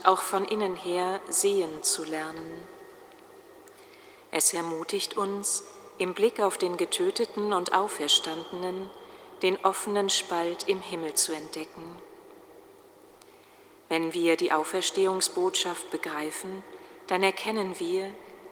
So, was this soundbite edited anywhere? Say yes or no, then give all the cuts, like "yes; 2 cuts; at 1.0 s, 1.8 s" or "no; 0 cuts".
no; 0 cuts